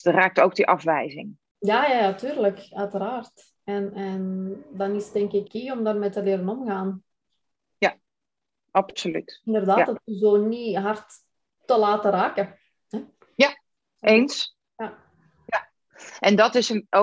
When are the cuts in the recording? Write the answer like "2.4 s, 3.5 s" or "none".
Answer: 5.5 s